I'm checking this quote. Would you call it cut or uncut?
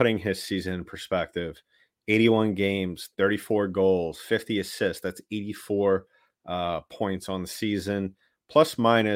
uncut